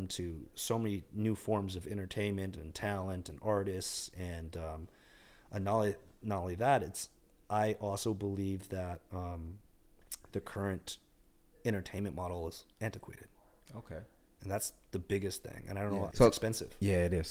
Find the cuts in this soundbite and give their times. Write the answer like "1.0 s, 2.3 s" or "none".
16.1 s